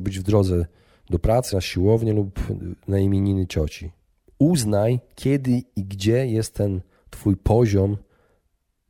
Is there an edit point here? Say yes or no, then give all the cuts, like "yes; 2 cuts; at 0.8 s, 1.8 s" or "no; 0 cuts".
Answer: yes; 1 cut; at 1.5 s